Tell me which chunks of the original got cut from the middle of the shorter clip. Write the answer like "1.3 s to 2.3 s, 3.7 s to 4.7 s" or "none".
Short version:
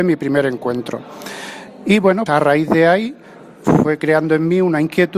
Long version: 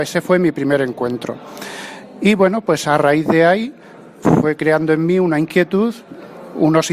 2.6 s to 2.8 s